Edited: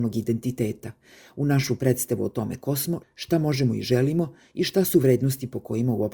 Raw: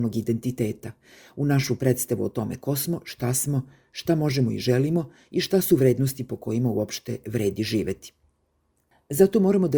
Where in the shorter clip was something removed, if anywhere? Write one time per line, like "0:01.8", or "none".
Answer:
0:03.0